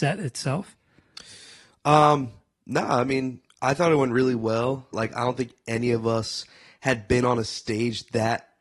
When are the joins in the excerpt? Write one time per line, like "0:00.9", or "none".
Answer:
0:04.9